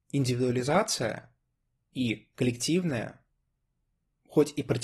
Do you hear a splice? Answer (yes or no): no